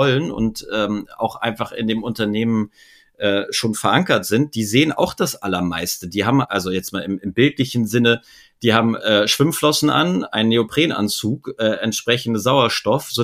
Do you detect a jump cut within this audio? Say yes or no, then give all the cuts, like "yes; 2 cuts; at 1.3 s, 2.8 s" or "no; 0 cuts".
no; 0 cuts